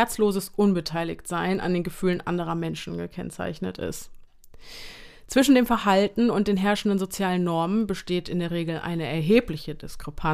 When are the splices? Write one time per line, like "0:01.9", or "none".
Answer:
none